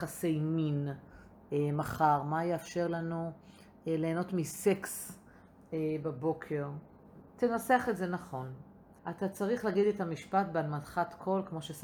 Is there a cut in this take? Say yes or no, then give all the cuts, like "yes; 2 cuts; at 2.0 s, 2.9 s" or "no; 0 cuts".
yes; 1 cut; at 9.0 s